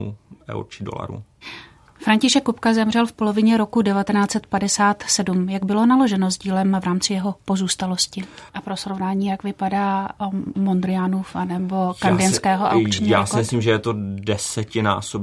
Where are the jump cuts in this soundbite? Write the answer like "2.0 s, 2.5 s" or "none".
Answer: 8.5 s